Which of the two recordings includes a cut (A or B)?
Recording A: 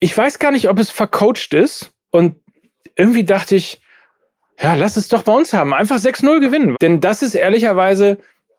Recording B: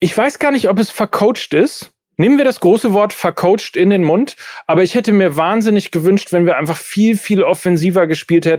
A